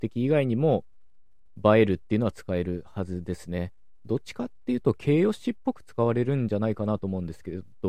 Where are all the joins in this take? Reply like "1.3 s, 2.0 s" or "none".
none

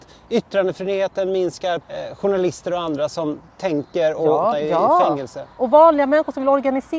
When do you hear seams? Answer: 1.8 s, 4.5 s

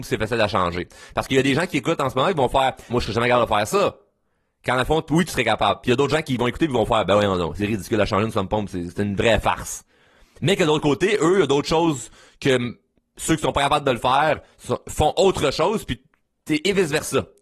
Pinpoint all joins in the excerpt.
2.9 s

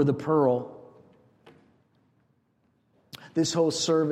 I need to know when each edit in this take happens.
none

